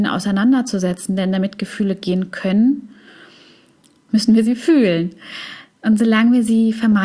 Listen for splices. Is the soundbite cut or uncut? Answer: uncut